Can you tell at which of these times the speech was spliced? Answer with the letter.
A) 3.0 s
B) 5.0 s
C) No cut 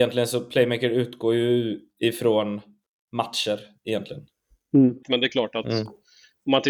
B